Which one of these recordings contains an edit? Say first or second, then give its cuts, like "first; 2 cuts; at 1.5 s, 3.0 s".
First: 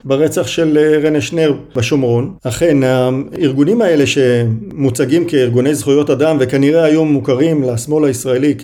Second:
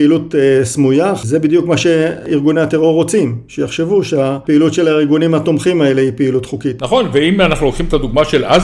first; 1 cut; at 2.4 s